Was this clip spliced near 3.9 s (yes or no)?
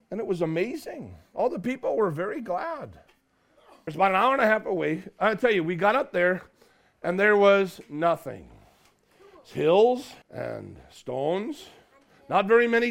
yes